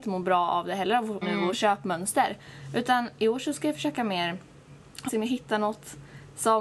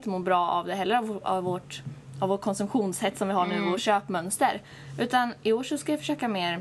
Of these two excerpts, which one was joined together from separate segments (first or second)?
first